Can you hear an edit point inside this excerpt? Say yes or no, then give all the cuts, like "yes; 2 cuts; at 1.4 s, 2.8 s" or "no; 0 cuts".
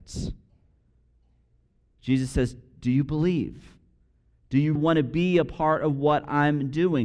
yes; 1 cut; at 4.8 s